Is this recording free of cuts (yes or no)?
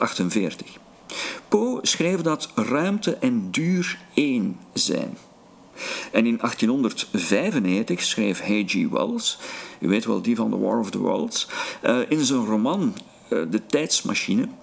yes